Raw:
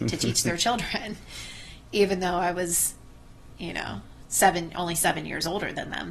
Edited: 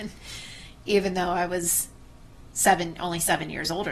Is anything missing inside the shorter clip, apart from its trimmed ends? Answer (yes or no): yes